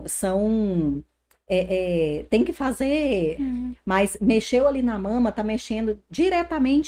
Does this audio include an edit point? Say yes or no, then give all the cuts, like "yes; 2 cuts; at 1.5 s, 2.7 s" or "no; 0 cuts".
yes; 1 cut; at 3.4 s